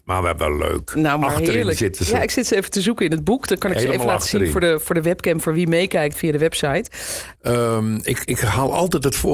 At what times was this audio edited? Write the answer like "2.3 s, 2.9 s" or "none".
6.1 s, 7.3 s